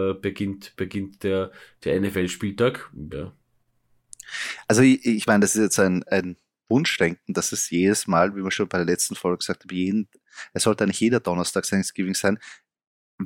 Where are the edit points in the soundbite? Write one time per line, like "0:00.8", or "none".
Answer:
0:03.1